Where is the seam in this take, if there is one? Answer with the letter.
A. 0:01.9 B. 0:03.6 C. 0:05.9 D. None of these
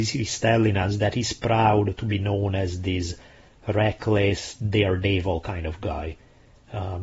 D